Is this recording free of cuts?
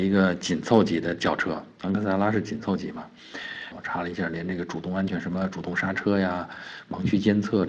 no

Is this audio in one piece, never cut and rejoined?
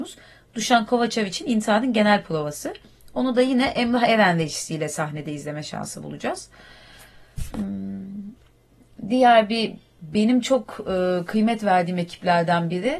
yes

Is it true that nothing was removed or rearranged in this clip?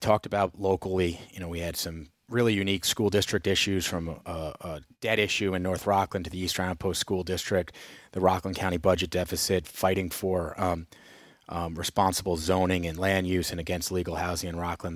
yes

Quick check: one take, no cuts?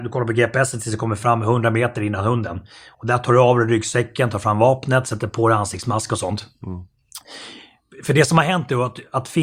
yes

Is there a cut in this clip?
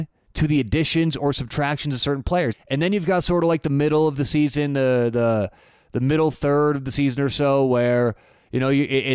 yes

